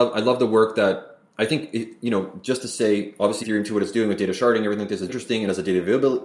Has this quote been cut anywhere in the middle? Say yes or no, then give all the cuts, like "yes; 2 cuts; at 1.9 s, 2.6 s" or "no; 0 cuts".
yes; 2 cuts; at 3.4 s, 5.1 s